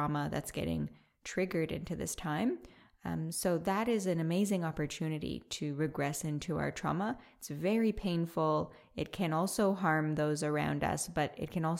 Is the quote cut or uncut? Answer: uncut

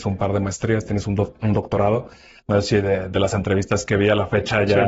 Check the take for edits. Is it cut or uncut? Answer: uncut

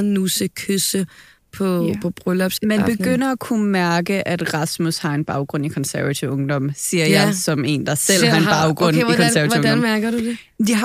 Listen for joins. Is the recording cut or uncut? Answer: uncut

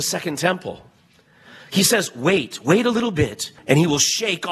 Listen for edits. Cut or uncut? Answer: cut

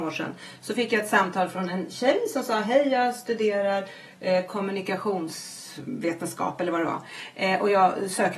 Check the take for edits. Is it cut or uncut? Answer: uncut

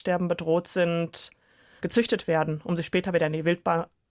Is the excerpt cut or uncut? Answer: uncut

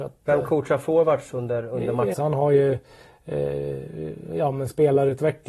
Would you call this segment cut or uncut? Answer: cut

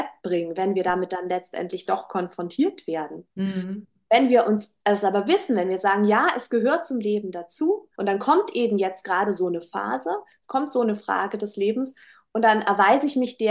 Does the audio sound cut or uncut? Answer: cut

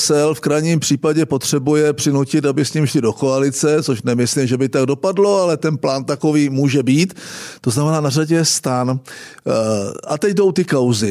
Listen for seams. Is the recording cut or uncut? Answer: uncut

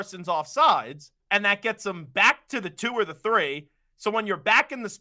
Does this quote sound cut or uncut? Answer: cut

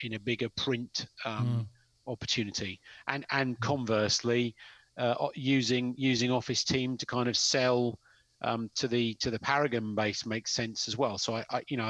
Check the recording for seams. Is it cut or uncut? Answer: uncut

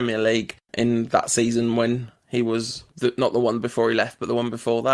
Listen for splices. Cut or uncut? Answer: uncut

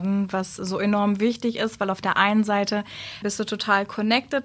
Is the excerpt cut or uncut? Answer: cut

